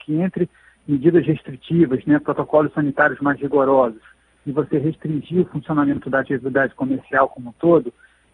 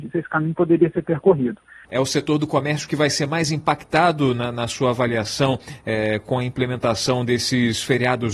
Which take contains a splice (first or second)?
second